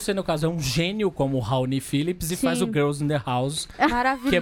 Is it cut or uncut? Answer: uncut